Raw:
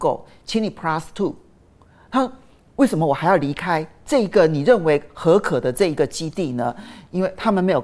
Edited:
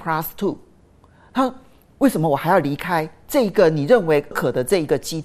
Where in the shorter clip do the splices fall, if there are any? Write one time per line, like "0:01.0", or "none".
0:04.3